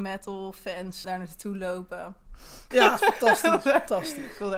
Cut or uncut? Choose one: cut